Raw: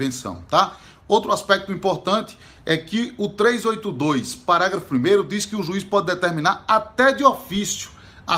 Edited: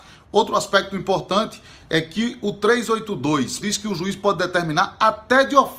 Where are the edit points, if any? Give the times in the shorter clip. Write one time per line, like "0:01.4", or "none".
0:03.6